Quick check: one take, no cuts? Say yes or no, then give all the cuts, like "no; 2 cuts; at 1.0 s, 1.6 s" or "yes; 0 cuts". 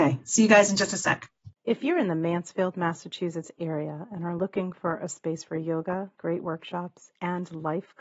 no; 2 cuts; at 1.6 s, 6.1 s